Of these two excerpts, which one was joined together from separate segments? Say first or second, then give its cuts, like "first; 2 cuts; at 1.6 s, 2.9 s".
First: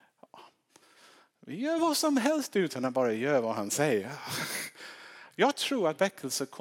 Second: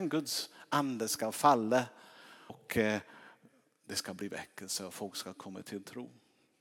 second; 1 cut; at 2.5 s